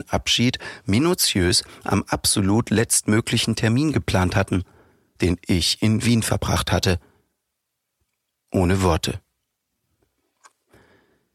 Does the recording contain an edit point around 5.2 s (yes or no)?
yes